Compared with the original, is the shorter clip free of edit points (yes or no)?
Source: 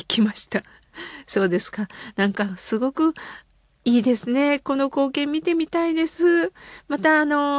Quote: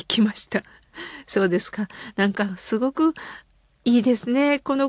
yes